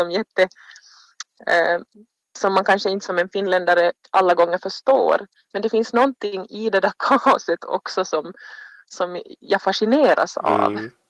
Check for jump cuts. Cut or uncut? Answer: uncut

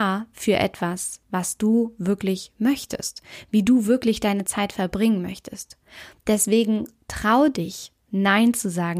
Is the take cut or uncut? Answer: uncut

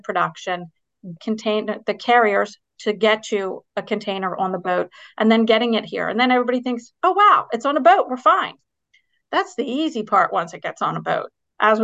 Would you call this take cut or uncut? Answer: cut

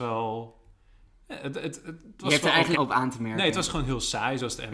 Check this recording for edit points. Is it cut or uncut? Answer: cut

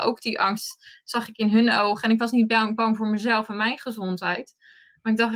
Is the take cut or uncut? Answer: uncut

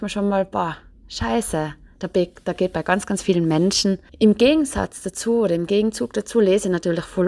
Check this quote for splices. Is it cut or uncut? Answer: cut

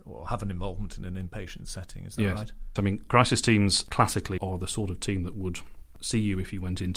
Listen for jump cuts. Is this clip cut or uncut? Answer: cut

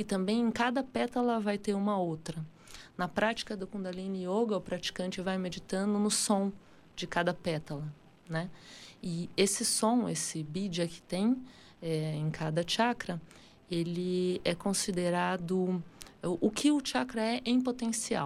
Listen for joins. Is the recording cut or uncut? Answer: uncut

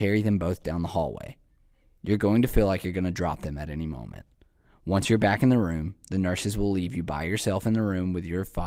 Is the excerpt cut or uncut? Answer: uncut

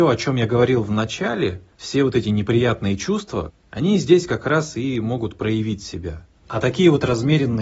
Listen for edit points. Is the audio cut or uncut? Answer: cut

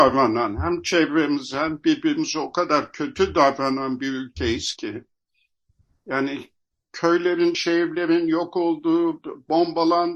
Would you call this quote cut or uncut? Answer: uncut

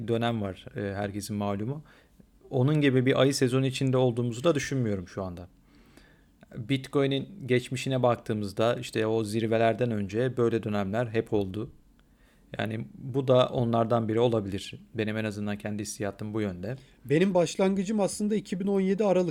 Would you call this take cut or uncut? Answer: uncut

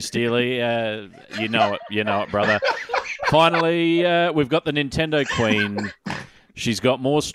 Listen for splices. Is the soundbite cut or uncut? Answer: uncut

